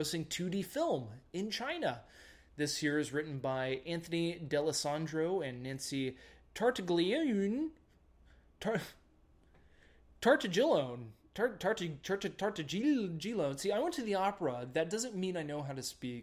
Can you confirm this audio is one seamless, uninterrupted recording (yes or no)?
yes